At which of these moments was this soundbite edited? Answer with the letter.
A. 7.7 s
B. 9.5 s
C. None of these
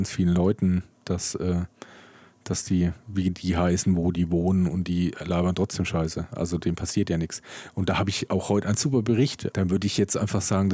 B